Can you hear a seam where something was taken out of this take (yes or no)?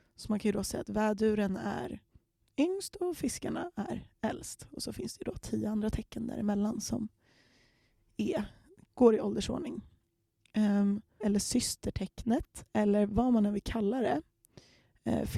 yes